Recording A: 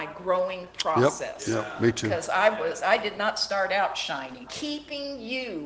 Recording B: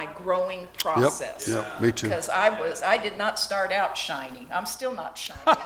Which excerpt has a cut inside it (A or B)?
A